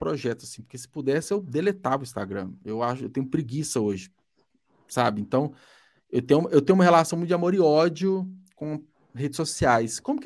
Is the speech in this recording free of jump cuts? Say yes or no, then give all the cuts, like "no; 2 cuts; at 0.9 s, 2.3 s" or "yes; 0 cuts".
yes; 0 cuts